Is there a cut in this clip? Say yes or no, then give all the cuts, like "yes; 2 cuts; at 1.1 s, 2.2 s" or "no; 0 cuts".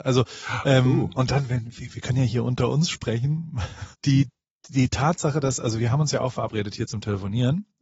yes; 2 cuts; at 1.2 s, 3.9 s